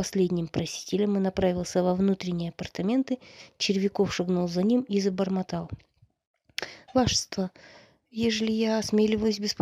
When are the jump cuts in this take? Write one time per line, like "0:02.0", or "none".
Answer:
none